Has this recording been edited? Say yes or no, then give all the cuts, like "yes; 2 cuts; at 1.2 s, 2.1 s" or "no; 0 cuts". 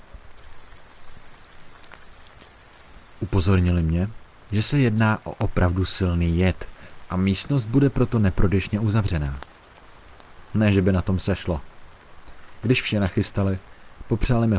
no; 0 cuts